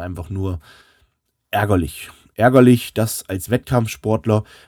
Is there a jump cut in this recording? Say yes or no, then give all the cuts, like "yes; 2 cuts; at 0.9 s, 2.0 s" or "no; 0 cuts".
no; 0 cuts